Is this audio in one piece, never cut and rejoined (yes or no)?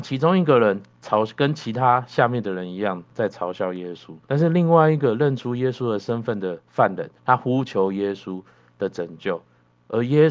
no